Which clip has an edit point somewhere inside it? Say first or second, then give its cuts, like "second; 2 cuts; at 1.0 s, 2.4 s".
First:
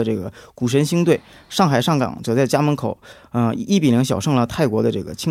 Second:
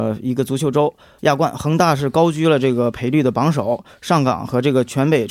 second; 1 cut; at 1.2 s